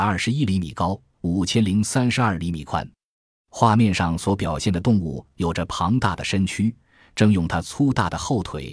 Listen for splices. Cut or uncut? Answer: uncut